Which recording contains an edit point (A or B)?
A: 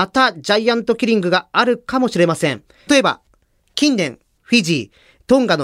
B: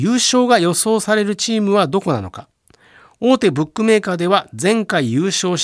A